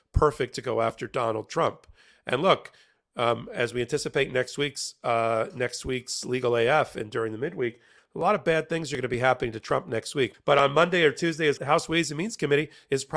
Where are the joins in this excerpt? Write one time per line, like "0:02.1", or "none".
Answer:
0:10.3
0:11.6